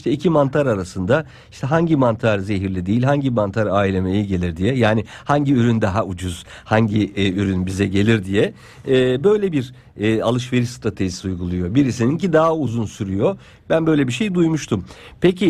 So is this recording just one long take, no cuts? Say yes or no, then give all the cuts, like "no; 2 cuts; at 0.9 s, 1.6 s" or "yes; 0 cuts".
yes; 0 cuts